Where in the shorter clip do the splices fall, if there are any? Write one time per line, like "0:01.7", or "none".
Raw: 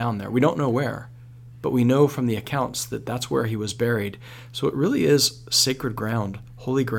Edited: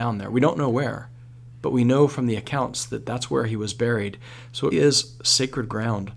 0:04.7